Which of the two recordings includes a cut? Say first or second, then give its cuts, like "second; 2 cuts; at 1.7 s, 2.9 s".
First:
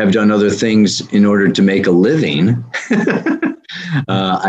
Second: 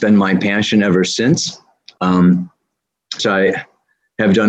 second; 1 cut; at 3.2 s